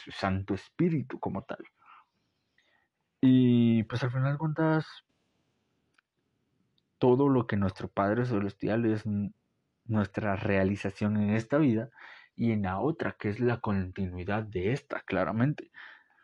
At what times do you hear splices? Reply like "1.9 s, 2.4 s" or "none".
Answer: none